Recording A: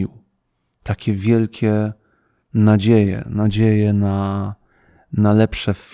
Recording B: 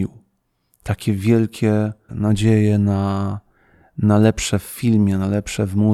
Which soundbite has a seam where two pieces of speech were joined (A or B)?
B